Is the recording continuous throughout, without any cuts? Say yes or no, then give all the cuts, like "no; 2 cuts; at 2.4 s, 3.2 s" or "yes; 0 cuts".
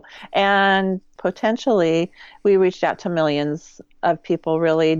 yes; 0 cuts